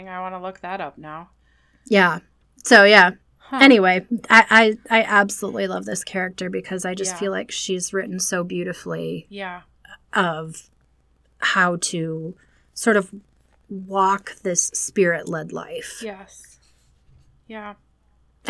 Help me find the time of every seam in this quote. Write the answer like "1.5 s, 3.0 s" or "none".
none